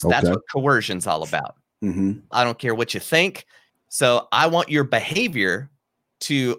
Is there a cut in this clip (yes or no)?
yes